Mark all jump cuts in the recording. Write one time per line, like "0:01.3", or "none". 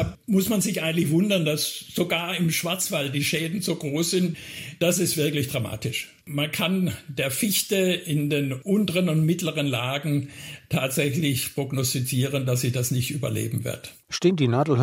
none